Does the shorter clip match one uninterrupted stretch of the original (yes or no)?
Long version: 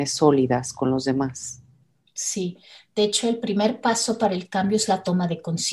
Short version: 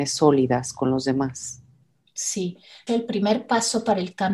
no